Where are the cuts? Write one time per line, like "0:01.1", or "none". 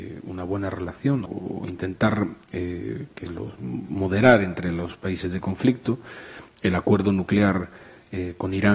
0:01.3